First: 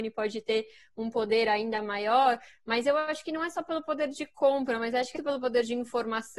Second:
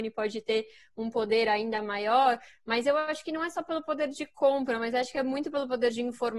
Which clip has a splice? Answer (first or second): first